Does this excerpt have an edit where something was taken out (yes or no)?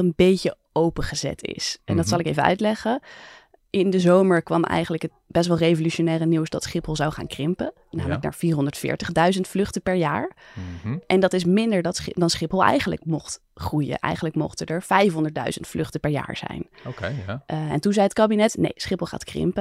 no